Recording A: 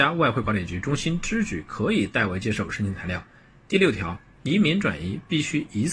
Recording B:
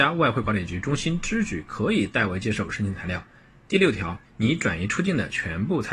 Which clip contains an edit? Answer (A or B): B